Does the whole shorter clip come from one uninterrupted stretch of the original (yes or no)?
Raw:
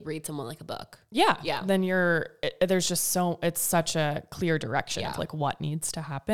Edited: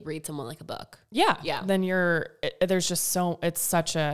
yes